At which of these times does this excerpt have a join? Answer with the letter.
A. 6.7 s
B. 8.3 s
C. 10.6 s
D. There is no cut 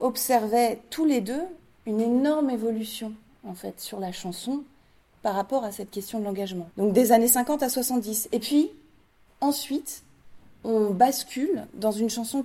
A